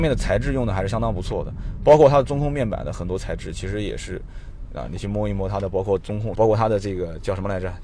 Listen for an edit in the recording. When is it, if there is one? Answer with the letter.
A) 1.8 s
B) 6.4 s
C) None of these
B